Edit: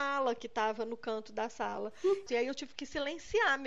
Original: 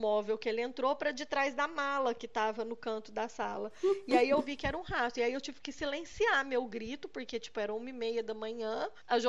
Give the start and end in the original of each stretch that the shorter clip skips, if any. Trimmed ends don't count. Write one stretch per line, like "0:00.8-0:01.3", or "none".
0:04.1-0:05.1